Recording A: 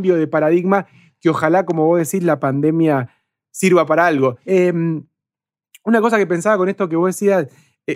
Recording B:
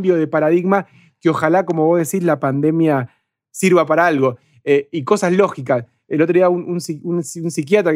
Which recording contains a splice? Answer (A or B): A